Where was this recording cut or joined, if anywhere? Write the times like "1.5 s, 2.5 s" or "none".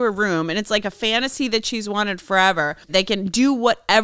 2.9 s